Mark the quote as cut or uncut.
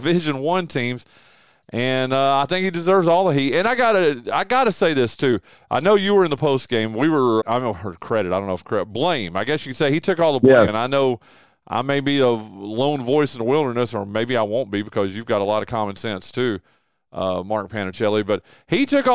cut